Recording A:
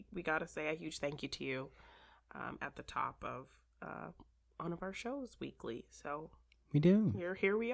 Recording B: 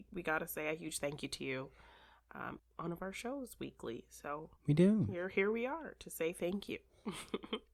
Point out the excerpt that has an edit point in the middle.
B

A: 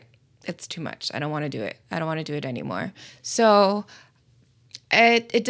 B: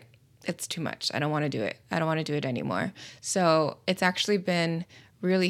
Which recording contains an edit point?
A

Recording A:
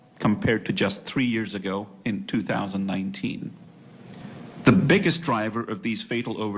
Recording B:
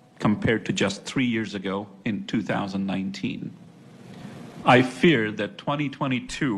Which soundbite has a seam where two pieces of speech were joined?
B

